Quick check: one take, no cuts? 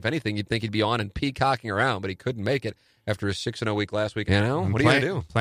no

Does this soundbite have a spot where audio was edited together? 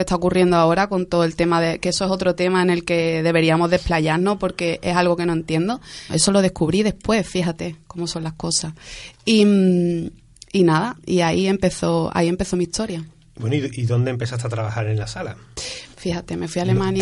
yes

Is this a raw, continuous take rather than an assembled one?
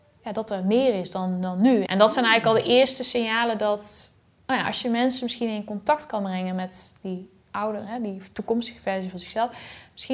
no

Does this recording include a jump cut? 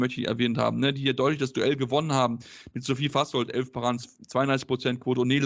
no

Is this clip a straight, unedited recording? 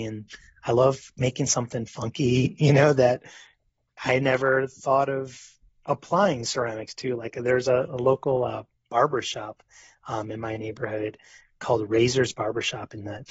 yes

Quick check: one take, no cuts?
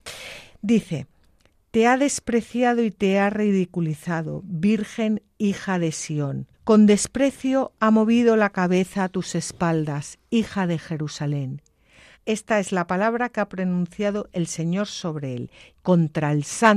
no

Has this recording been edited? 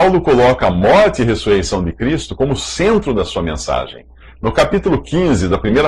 no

